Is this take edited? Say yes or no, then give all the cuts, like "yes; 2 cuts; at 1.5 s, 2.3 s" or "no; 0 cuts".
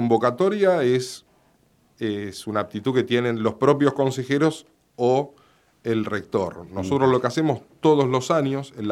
no; 0 cuts